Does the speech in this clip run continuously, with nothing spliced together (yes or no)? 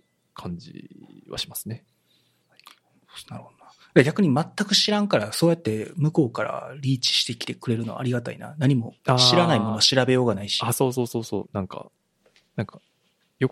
no